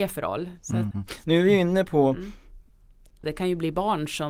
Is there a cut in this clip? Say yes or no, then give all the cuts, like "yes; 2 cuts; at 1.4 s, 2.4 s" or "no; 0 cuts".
yes; 2 cuts; at 0.9 s, 3.2 s